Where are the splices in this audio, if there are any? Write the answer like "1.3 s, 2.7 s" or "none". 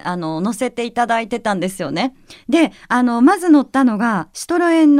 none

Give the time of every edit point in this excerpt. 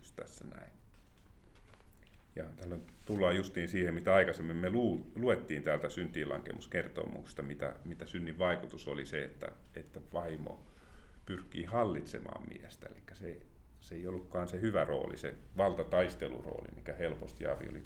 none

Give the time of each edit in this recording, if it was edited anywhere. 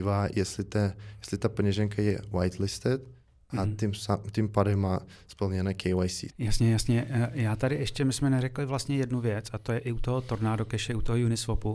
6.3 s

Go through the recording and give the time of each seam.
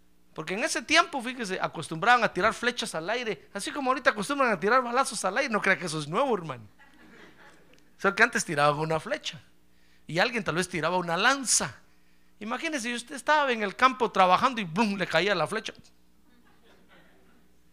none

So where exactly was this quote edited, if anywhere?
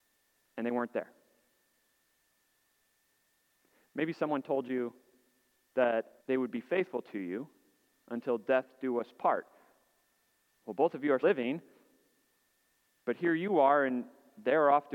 6.2 s, 11.2 s

